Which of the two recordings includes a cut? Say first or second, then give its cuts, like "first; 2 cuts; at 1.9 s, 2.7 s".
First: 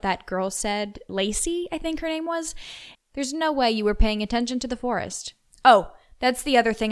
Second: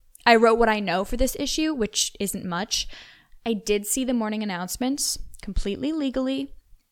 first; 2 cuts; at 1.1 s, 2.9 s